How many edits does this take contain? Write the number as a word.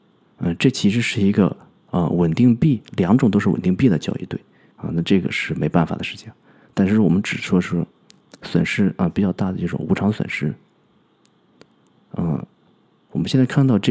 one